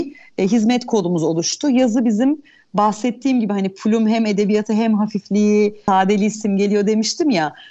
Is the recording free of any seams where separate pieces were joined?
yes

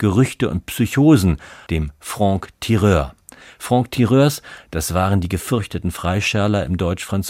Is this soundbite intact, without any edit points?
no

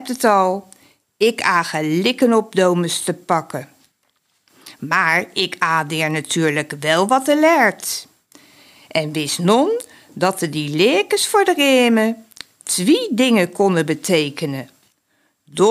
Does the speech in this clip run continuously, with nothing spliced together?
yes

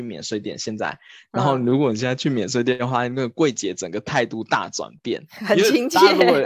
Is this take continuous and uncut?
yes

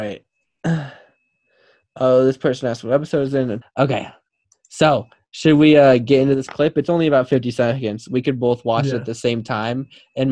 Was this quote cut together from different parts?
yes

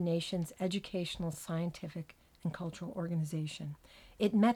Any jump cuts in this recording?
no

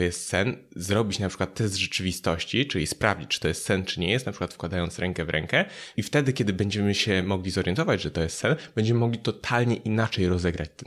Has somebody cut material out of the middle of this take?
yes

